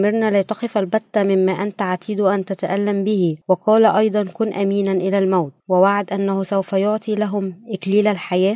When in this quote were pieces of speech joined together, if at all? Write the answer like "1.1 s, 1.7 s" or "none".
3.4 s, 5.6 s